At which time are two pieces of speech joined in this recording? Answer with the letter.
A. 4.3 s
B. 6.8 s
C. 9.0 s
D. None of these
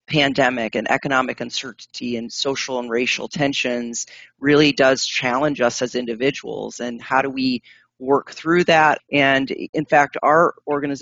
C